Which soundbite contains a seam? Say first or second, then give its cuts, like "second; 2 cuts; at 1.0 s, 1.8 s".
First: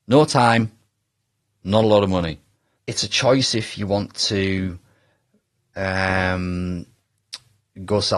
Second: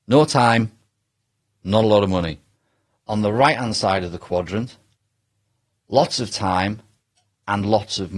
first; 1 cut; at 2.8 s